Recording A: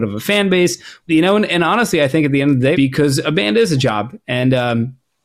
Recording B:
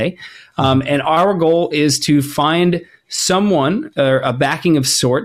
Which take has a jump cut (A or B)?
A